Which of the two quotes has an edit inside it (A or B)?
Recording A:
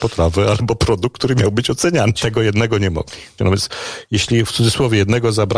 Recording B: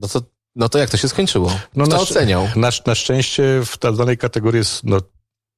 A